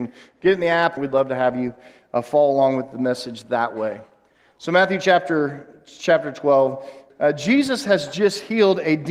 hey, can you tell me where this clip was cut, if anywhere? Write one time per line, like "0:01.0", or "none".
0:01.0
0:07.1